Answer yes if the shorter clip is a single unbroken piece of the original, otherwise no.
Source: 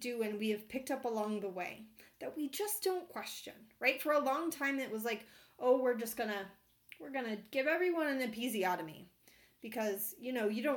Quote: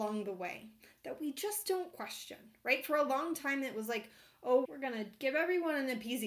no